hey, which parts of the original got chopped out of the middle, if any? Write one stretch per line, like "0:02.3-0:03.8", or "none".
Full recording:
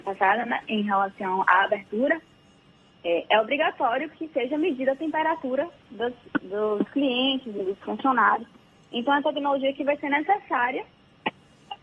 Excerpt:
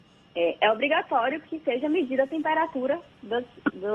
none